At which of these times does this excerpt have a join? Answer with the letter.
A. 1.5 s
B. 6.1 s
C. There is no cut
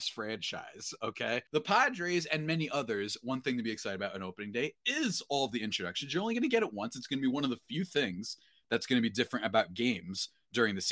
A